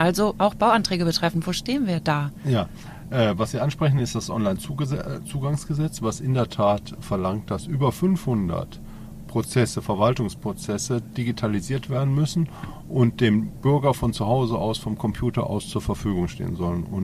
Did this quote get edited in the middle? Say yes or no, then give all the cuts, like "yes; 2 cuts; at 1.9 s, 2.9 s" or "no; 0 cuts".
no; 0 cuts